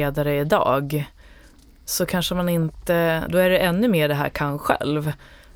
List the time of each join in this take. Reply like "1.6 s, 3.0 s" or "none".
3.3 s